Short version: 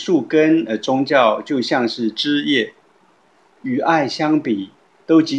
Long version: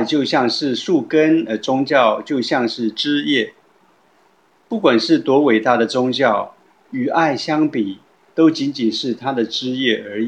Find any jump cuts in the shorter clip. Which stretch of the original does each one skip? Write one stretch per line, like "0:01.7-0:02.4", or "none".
0:04.3-0:06.8